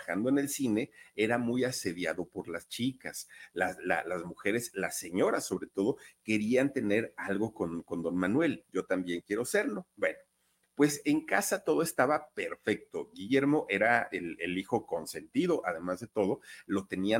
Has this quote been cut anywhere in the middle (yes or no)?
yes